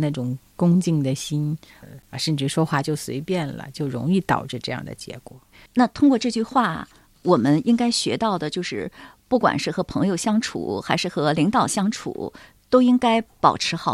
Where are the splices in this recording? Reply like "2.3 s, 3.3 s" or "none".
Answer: 5.7 s